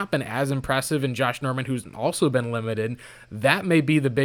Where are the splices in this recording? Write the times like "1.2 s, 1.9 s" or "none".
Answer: none